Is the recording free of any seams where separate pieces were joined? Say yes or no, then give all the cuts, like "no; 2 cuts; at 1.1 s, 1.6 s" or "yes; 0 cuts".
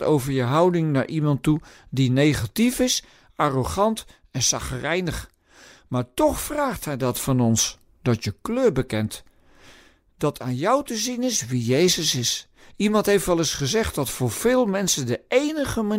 yes; 0 cuts